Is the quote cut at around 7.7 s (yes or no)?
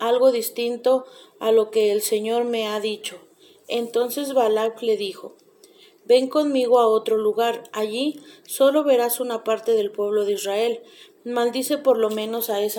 no